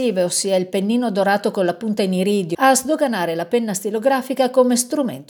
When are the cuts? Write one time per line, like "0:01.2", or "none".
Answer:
0:02.5